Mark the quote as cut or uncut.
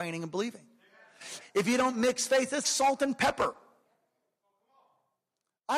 cut